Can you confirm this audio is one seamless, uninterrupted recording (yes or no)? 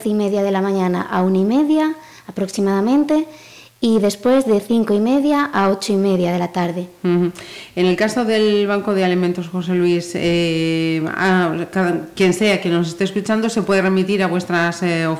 yes